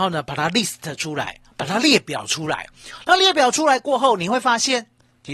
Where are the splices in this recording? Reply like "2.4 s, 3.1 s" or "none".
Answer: none